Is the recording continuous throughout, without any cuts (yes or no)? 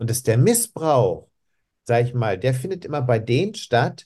yes